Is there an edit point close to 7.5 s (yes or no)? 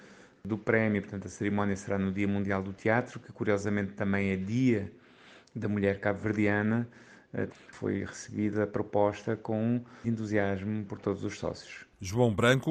yes